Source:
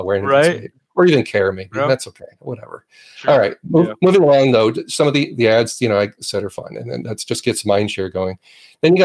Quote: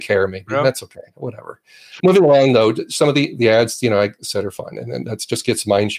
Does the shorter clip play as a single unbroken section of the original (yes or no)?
no